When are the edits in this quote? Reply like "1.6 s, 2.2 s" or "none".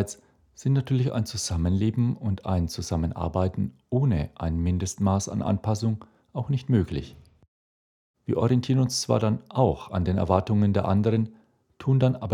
8.1 s